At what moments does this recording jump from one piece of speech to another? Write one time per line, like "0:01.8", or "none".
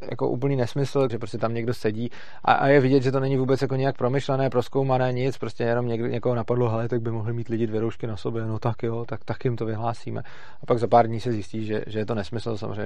0:01.1